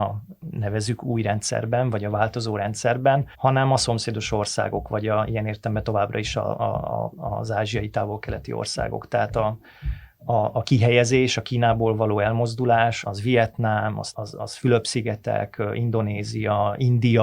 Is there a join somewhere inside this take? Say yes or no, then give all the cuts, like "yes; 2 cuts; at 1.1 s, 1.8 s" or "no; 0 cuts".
yes; 3 cuts; at 3.3 s, 13.0 s, 14.1 s